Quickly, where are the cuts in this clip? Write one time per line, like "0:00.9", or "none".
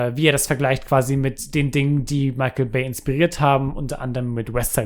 none